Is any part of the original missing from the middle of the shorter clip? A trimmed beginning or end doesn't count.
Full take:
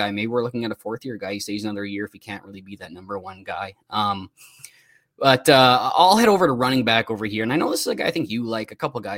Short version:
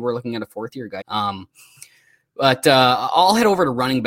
yes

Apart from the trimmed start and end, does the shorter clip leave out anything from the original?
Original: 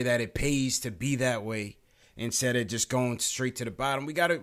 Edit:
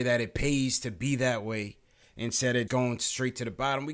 yes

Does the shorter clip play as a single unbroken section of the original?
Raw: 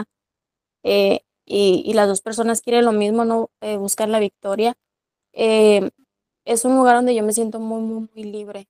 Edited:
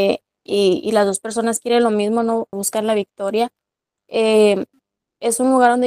no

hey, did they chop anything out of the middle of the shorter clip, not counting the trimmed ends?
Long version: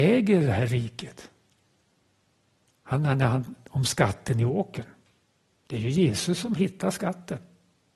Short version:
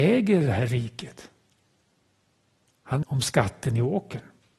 yes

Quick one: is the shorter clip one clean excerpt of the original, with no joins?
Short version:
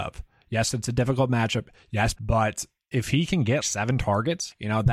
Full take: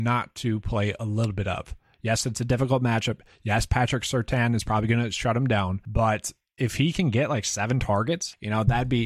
no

